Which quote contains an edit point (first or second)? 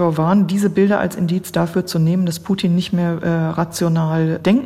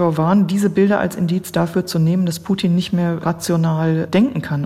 second